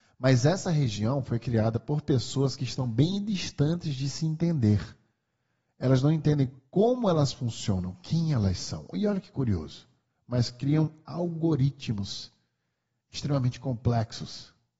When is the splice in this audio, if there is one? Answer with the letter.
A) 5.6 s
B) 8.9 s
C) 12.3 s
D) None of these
D